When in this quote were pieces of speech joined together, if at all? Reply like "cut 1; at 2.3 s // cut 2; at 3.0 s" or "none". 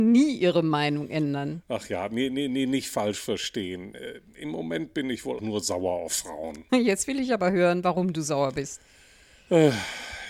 cut 1; at 5.4 s // cut 2; at 6.7 s